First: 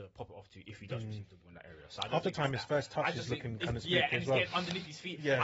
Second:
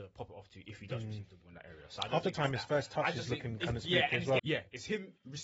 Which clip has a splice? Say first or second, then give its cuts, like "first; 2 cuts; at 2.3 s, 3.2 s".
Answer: second; 1 cut; at 4.4 s